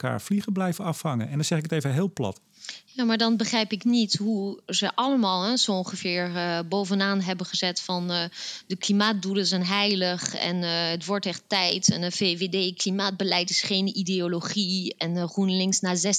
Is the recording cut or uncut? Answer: uncut